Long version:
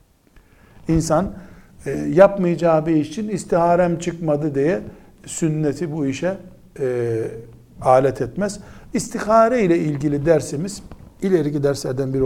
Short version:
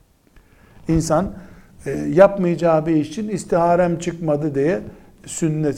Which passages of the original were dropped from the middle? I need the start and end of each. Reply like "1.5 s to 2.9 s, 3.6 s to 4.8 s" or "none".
none